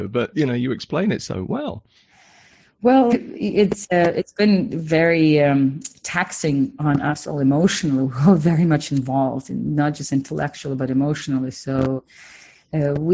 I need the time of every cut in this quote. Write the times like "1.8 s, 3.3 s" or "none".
3.1 s